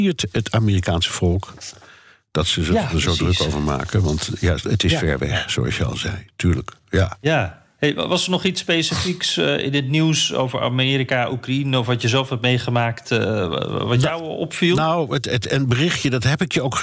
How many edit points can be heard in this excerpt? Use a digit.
0